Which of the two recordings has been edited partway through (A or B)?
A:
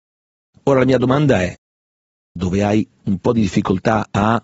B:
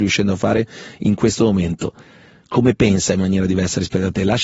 A